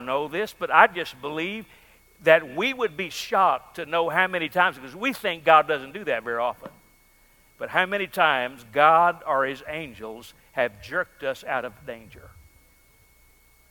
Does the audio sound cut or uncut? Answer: uncut